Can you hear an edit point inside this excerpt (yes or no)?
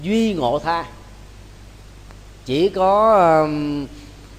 no